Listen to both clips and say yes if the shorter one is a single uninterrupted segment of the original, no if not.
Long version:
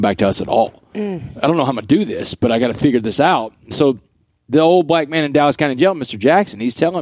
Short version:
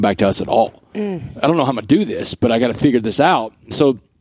yes